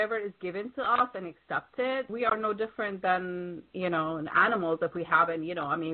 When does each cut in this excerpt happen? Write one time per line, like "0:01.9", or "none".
0:02.1

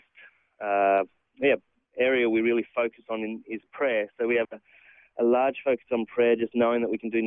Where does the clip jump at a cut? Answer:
none

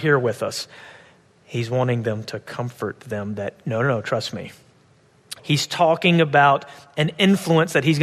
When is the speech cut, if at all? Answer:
0:05.4

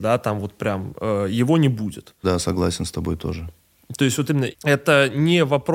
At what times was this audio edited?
0:02.2
0:04.5

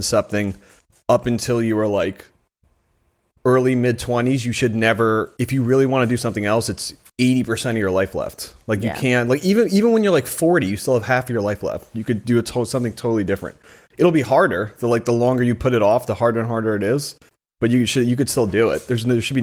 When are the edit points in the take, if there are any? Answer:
0:07.1

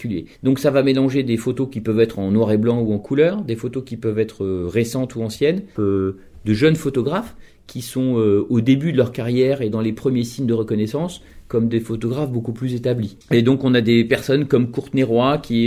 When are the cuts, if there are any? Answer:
0:05.8
0:13.2

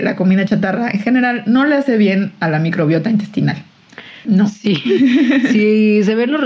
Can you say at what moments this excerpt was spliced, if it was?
0:04.2

